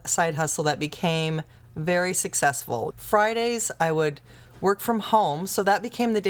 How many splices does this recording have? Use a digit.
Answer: 1